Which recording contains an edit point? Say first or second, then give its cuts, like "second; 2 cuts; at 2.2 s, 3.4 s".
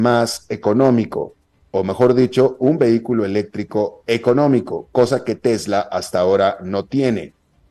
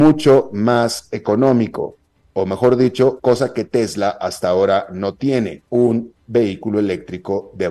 second; 2 cuts; at 3.2 s, 5.7 s